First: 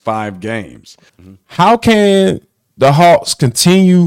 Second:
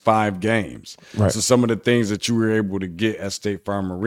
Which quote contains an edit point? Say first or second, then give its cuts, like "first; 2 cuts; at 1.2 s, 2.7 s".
first; 1 cut; at 1.1 s